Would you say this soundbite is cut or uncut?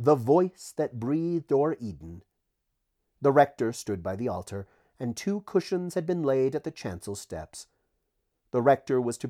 uncut